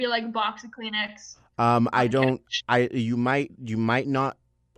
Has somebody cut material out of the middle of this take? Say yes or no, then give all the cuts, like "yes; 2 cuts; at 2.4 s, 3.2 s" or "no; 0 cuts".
no; 0 cuts